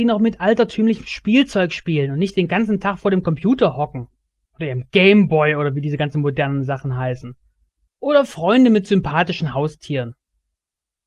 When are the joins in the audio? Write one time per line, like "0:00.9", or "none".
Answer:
0:07.9

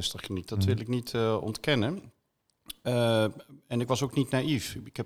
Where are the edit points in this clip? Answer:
none

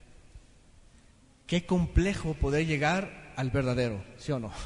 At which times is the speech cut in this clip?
none

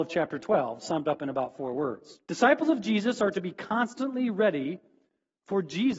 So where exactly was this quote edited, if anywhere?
0:02.2

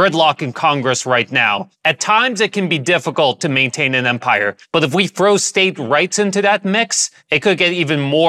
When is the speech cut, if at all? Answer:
none

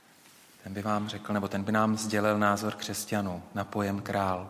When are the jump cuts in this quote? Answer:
none

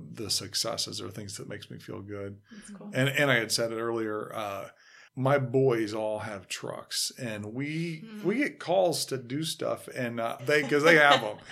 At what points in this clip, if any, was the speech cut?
0:05.1
0:10.4

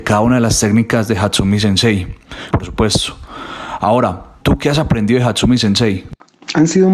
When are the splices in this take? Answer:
0:02.5
0:04.4

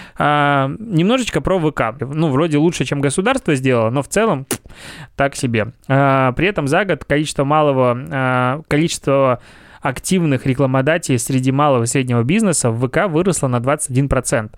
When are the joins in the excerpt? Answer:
0:02.0

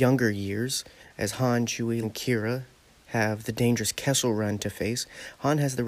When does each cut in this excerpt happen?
0:02.0

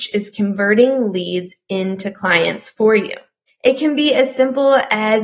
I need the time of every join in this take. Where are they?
0:03.5

